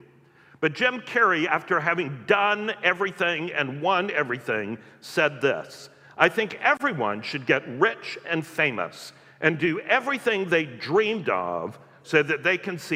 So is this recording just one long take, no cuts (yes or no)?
yes